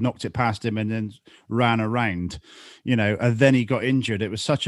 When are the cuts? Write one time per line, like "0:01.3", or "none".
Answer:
none